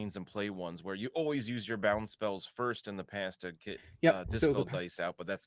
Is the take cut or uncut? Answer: uncut